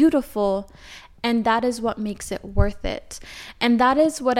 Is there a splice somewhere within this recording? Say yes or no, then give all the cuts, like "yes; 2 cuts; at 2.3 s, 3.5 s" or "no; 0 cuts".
no; 0 cuts